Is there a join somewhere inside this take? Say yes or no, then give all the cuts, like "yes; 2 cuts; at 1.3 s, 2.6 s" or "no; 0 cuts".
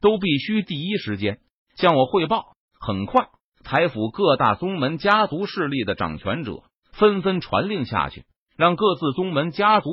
no; 0 cuts